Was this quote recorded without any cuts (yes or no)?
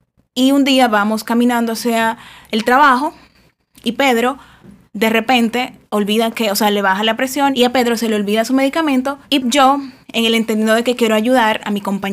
no